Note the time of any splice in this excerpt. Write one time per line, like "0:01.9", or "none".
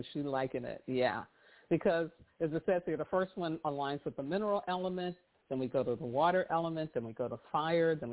none